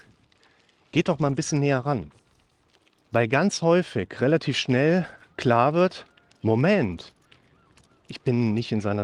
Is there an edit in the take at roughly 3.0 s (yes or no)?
yes